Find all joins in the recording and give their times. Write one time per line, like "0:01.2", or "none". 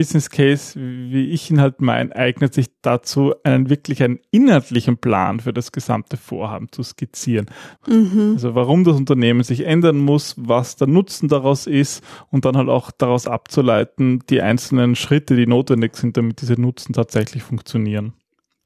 0:07.8